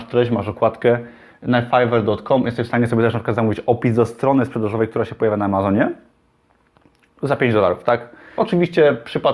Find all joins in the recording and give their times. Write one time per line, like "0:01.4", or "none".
0:08.4